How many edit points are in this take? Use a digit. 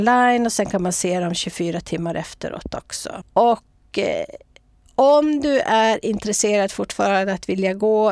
1